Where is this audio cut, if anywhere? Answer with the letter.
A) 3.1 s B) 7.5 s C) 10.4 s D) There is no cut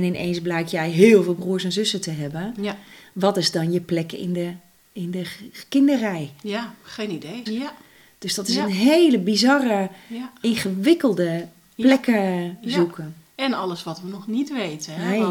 B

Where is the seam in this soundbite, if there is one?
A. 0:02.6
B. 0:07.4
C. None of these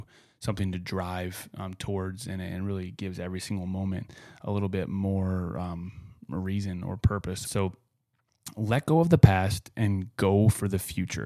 B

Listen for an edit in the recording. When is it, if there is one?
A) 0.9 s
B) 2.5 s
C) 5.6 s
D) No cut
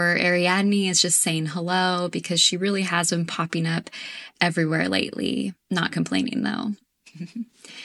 C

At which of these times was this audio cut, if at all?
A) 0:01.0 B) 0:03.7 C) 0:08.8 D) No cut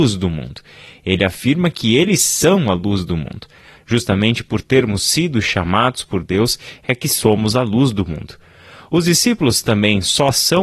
B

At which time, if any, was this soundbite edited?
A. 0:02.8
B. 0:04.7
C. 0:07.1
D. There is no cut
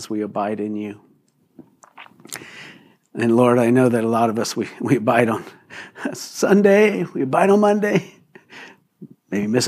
D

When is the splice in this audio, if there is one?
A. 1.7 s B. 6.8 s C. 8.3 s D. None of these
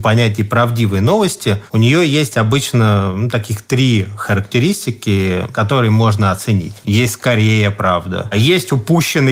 B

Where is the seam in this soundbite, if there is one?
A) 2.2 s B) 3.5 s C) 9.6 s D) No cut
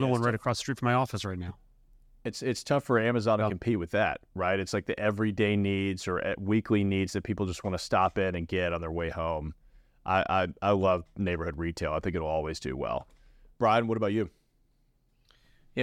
D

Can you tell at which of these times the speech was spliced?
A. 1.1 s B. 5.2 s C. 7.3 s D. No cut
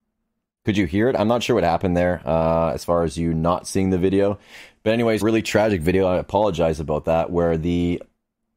B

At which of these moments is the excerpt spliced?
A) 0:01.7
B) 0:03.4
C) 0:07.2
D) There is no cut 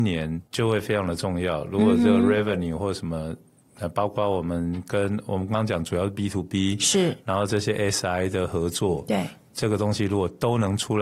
D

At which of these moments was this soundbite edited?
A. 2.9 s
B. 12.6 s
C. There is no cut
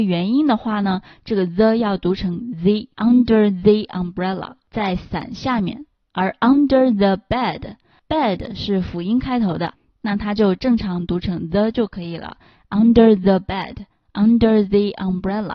A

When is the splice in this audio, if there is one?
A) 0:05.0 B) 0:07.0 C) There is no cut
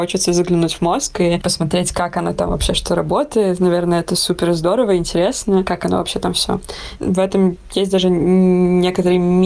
B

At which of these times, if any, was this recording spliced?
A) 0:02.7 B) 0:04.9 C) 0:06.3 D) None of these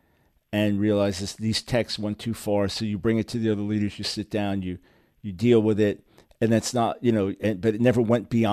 D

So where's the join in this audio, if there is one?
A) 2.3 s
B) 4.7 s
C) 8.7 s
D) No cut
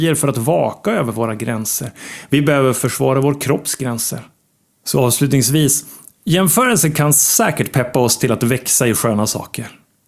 B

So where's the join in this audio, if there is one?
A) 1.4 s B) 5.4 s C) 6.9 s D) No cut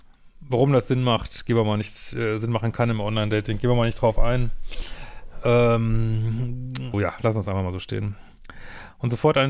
C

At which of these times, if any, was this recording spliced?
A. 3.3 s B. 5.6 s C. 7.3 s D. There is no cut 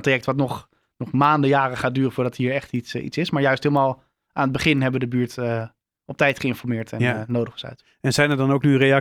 D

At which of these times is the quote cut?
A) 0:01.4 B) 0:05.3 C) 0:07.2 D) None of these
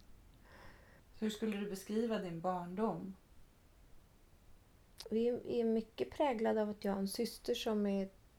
D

